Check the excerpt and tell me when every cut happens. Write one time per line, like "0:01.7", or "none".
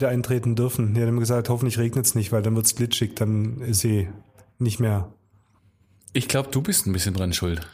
none